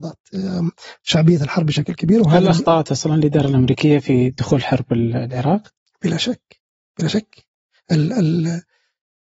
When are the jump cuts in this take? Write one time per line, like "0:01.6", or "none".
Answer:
none